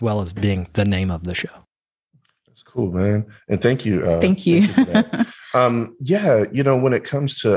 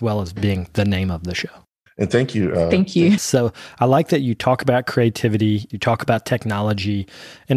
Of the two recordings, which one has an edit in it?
second; 3 cuts; at 1.9 s, 3.2 s, 5.7 s

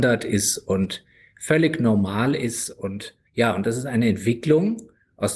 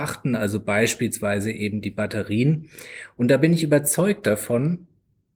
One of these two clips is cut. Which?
first; 1 cut; at 3.3 s

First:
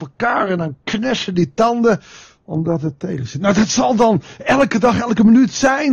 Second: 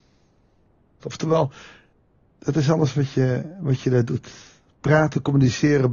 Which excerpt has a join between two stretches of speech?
second; 1 cut; at 1.0 s

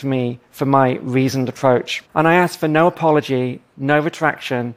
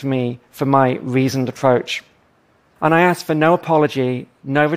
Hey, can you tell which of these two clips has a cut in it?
first; 1 cut; at 2.0 s

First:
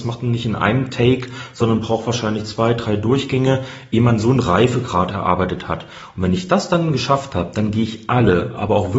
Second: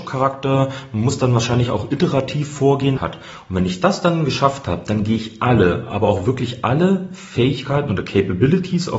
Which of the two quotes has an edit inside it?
second; 1 cut; at 3.0 s

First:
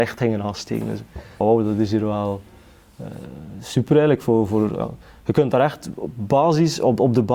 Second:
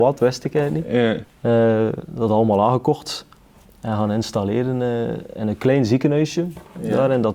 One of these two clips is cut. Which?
first; 1 cut; at 1.4 s

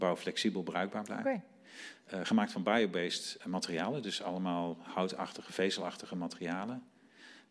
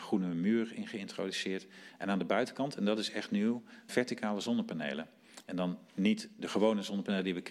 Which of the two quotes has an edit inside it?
second; 1 cut; at 3.9 s

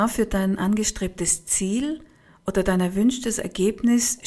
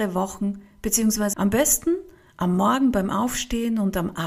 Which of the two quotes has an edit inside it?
second; 1 cut; at 1.3 s

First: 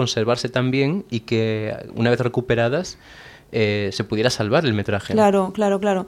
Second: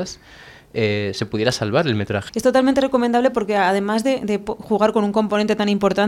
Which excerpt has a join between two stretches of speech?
second; 1 cut; at 2.3 s

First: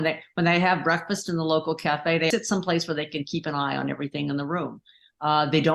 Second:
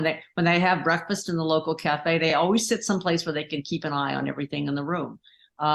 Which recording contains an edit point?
first; 1 cut; at 2.3 s

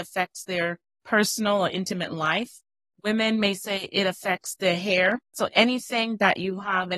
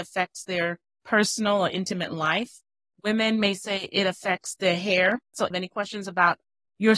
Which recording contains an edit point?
second; 1 cut; at 5.5 s

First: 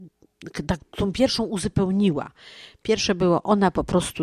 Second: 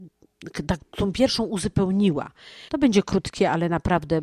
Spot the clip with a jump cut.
second; 1 cut; at 2.7 s

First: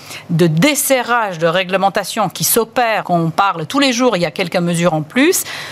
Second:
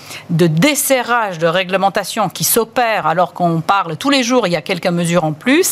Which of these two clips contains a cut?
first; 1 cut; at 3.0 s

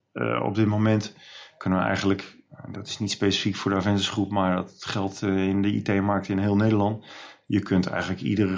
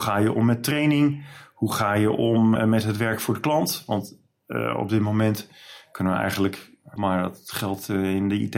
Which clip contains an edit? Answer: second; 2 cuts; at 2.6 s, 7.0 s

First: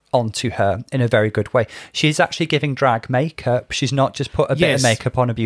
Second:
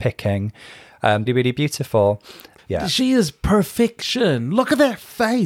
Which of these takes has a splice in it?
second; 2 cuts; at 1.3 s, 2.6 s

